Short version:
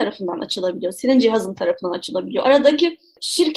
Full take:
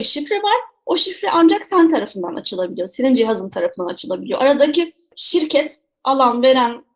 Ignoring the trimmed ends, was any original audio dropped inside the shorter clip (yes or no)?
no